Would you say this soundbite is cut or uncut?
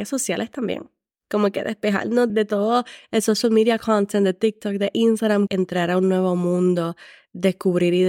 cut